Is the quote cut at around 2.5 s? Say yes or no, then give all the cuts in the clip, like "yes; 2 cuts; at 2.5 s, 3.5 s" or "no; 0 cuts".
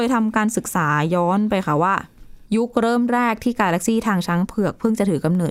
yes; 1 cut; at 2.5 s